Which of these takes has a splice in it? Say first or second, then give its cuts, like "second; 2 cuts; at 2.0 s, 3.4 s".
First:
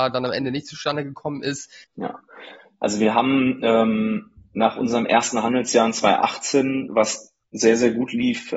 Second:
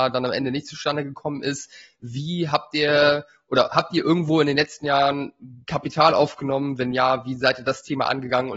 first; 1 cut; at 1.8 s